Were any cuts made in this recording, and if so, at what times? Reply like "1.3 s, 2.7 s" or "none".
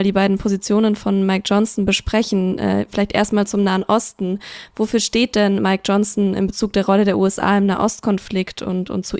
none

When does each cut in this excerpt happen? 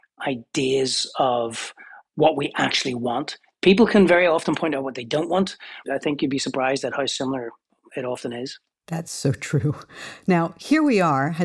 5.8 s

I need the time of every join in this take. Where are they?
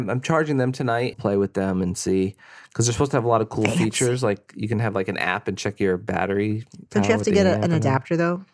1.1 s

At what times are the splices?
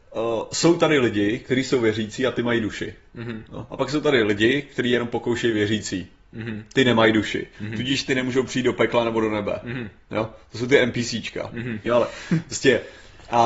11.9 s

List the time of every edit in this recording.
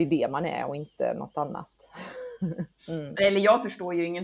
2.8 s

